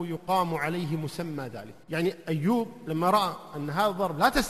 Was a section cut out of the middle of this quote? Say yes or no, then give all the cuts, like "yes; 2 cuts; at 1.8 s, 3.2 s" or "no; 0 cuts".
yes; 1 cut; at 1.8 s